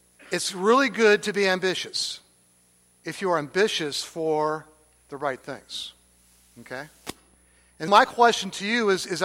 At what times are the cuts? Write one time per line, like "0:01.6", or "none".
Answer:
0:07.9